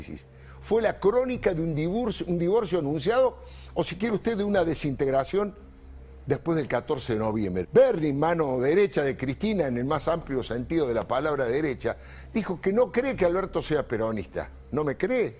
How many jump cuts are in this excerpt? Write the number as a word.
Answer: one